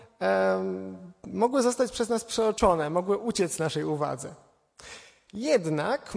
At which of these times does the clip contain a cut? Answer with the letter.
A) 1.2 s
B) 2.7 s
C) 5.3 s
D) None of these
C